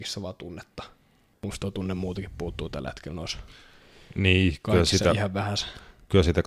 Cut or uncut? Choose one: uncut